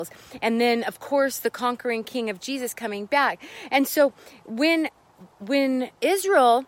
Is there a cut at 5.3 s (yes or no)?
yes